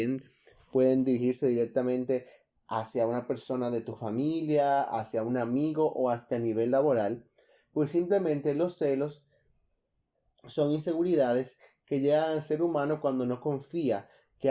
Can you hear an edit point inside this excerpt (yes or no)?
no